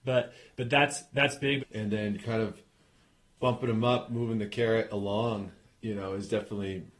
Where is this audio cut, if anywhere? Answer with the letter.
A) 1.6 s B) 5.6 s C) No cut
A